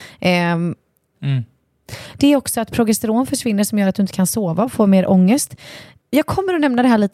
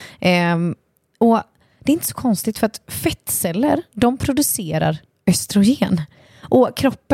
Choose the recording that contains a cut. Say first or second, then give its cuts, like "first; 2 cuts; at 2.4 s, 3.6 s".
first; 1 cut; at 1.1 s